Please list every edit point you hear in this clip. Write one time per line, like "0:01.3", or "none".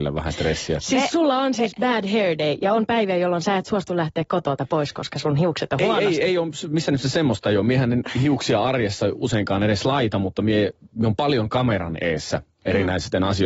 none